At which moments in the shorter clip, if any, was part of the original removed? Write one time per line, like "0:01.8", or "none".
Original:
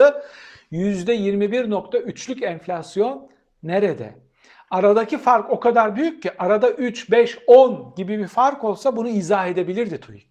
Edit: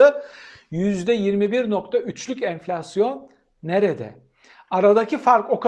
none